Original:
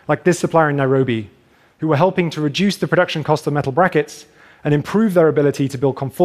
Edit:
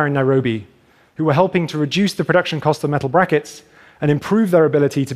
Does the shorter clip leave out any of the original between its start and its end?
no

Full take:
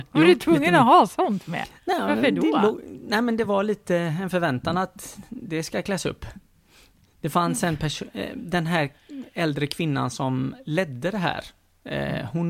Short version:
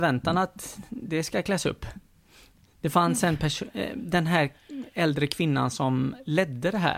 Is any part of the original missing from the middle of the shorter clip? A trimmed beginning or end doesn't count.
no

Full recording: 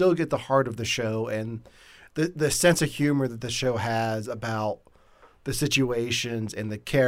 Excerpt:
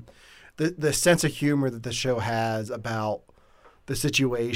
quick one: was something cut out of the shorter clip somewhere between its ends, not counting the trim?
no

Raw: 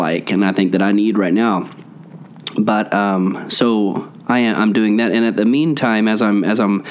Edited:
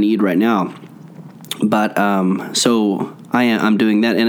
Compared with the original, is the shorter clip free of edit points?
yes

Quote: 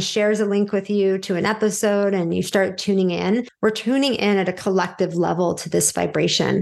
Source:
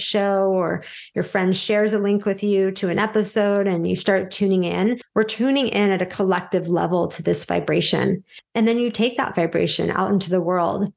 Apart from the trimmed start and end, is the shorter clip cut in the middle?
no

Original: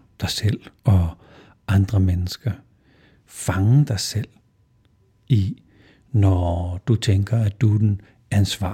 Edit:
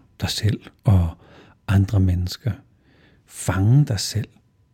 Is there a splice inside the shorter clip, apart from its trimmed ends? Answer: no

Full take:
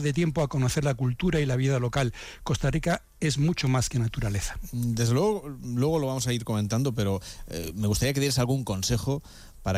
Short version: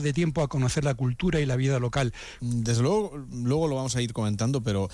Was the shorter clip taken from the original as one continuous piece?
no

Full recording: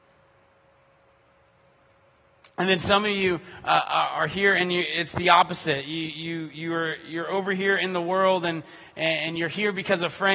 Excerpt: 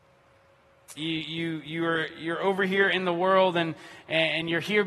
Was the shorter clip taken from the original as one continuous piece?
no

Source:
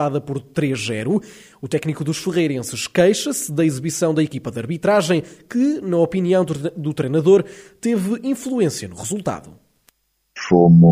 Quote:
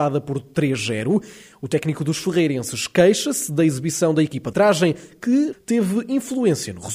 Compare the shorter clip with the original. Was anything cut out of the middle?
yes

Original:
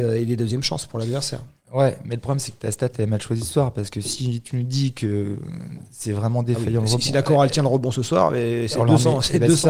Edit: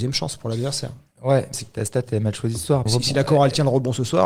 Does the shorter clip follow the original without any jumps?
no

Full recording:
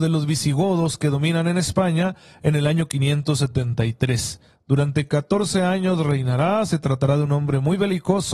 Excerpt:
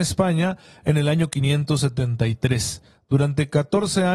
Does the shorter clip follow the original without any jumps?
yes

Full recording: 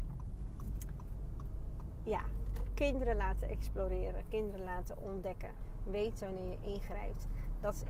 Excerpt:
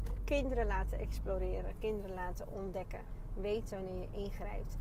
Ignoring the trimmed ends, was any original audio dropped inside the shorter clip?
no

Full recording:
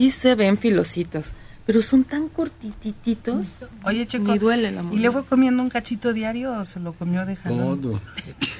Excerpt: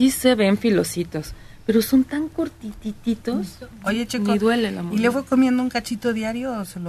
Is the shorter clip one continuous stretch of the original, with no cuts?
yes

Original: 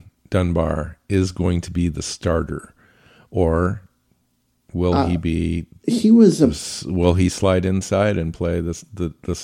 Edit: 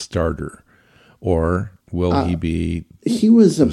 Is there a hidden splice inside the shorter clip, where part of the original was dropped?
yes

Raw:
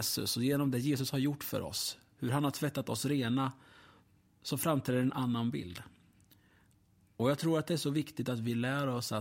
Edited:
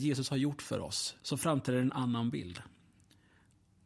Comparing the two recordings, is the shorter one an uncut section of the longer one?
no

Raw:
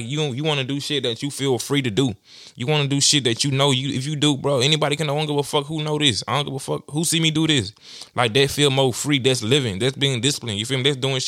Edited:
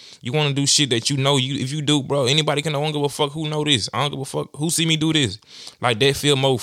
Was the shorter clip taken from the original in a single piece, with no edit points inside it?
yes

